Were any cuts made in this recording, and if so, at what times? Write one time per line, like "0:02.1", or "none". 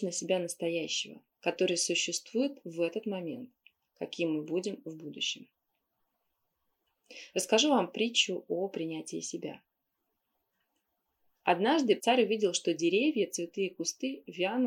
0:03.9
0:12.0